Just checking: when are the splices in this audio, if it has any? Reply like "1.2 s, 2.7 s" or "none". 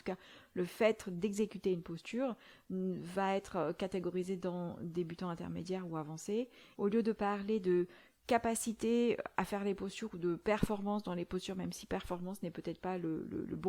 6.8 s